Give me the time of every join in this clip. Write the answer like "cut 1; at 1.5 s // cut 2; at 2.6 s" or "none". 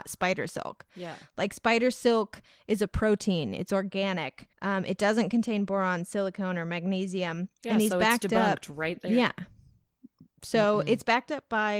cut 1; at 4.5 s